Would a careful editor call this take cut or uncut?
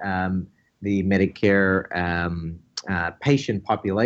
uncut